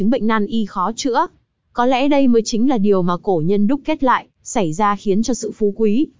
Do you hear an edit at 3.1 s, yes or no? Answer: no